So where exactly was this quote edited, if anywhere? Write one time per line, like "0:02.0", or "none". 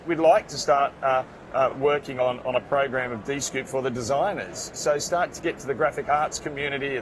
none